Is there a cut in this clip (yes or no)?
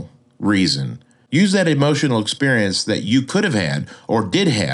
no